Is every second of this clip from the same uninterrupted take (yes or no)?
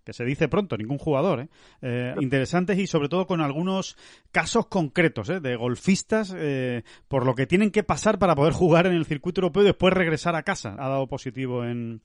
no